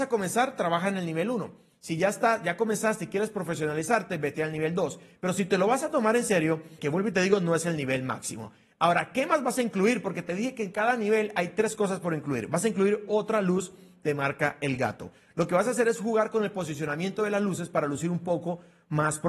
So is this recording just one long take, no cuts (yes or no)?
no